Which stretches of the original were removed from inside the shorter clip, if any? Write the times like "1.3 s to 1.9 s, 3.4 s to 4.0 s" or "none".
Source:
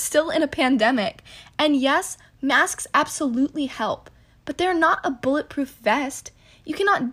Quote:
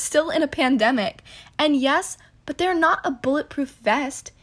2.4 s to 4.3 s